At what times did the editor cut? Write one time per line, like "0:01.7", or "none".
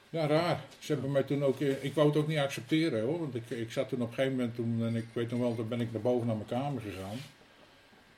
none